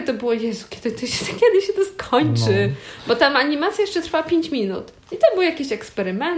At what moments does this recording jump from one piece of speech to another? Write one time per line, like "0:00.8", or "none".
none